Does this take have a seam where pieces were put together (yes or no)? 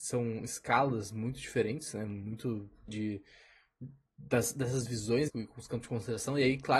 yes